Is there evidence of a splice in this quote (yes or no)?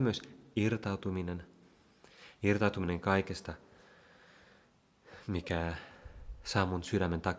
no